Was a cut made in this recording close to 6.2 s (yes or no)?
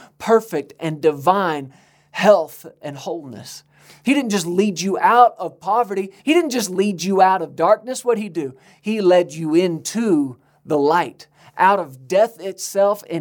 yes